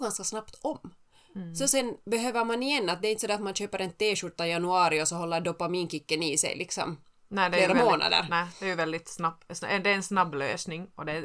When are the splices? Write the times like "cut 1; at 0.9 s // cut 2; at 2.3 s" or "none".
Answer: none

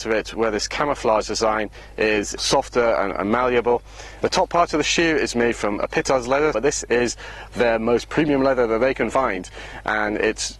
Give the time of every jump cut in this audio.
cut 1; at 4.2 s // cut 2; at 6.5 s

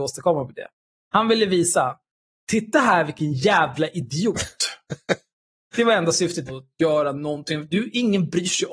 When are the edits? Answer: cut 1; at 6.5 s

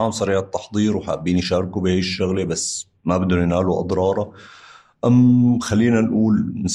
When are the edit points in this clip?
none

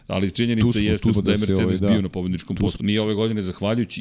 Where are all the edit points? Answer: cut 1; at 1.1 s // cut 2; at 2.8 s

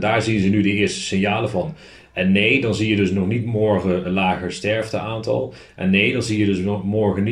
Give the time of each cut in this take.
cut 1; at 4.0 s

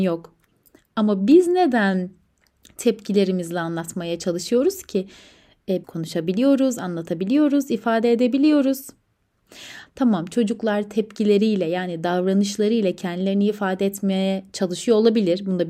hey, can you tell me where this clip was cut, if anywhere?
cut 1; at 5.8 s // cut 2; at 9.9 s

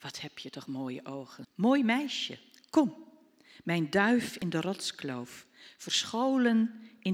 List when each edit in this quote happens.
cut 1; at 1.4 s

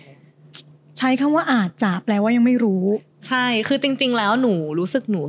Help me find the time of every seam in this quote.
none

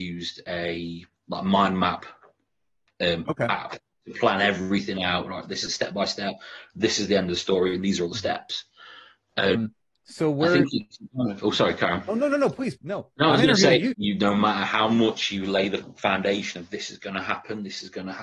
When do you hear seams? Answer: cut 1; at 9.5 s // cut 2; at 12.8 s // cut 3; at 13.9 s

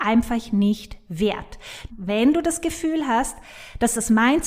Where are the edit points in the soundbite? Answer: cut 1; at 1.9 s

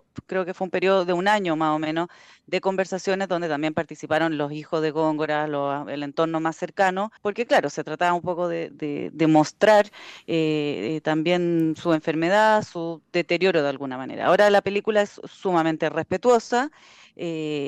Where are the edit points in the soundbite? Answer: cut 1; at 7.2 s // cut 2; at 8.7 s

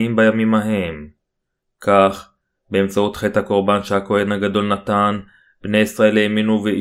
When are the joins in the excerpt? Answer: none

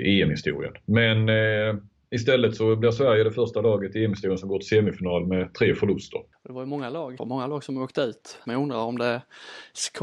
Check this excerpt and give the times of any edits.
cut 1; at 7.2 s // cut 2; at 8.4 s

